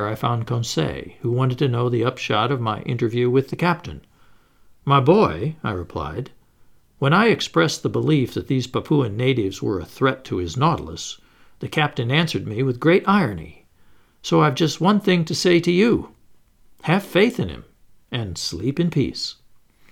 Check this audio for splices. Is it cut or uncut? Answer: uncut